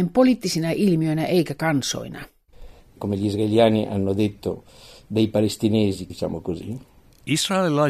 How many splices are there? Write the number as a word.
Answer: two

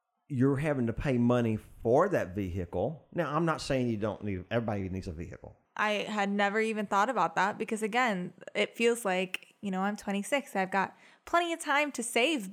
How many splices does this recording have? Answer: one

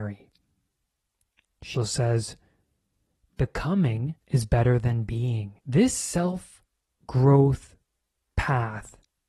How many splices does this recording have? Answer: three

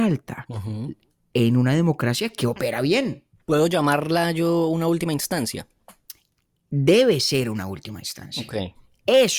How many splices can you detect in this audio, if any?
zero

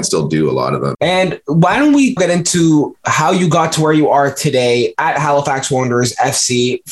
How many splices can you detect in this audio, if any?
two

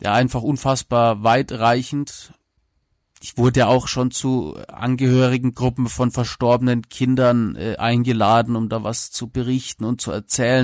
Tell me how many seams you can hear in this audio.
zero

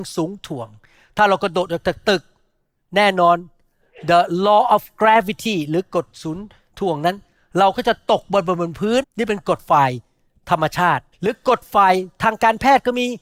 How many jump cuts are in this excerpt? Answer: two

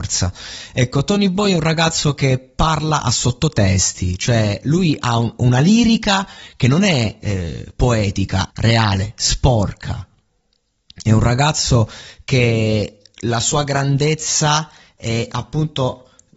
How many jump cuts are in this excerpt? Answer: one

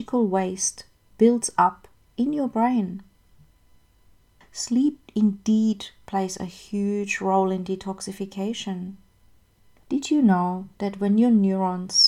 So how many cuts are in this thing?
two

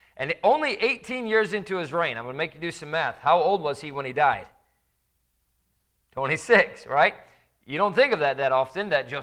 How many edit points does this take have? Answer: zero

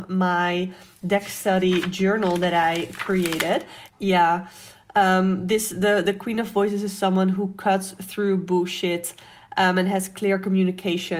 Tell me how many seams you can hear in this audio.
one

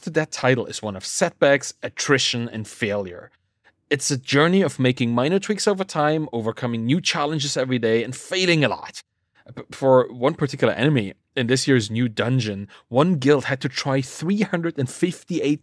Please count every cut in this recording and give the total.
zero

